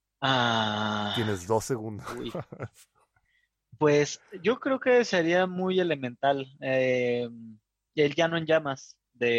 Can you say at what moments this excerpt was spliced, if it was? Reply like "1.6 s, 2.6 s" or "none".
none

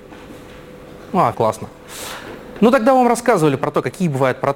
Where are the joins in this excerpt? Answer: 1.3 s

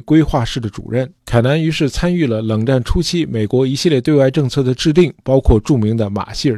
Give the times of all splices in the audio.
1.2 s

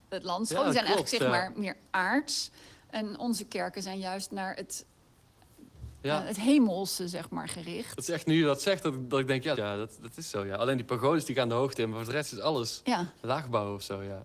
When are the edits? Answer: 9.5 s

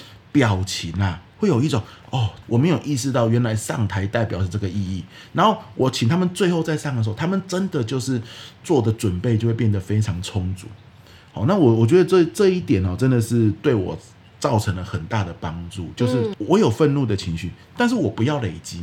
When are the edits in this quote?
2.4 s, 16.3 s

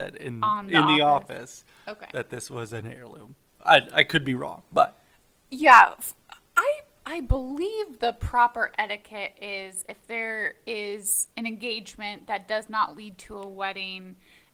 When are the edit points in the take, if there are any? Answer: none

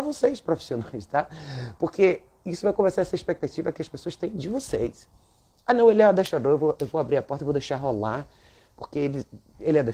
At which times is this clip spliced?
none

